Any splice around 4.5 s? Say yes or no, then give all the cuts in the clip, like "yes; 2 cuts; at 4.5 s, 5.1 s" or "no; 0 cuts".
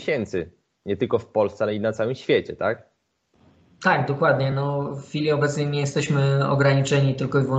no; 0 cuts